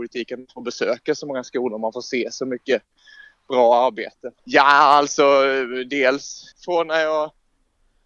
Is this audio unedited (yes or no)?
no